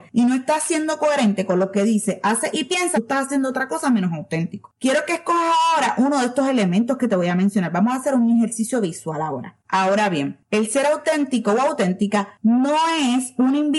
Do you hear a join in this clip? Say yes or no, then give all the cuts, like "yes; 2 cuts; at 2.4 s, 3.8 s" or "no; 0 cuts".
yes; 2 cuts; at 2.9 s, 9.6 s